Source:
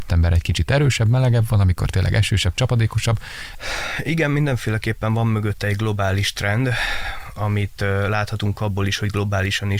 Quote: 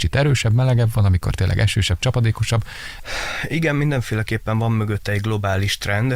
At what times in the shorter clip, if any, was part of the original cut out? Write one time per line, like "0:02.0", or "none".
none